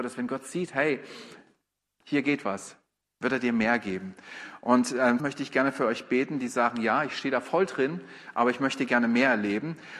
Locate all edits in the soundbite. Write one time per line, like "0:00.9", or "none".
0:05.2